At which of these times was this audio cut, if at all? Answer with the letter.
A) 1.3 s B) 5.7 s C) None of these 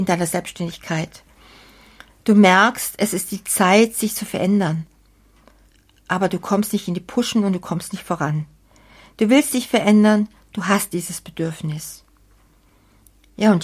C